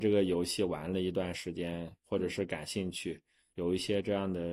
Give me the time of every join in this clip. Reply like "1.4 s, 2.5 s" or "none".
none

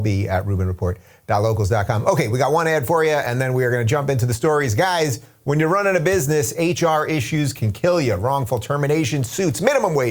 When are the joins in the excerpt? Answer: none

